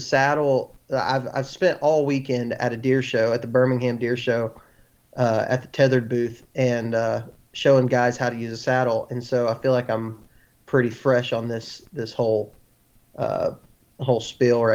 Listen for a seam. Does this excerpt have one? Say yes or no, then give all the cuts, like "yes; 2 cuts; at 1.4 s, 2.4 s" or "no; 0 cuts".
no; 0 cuts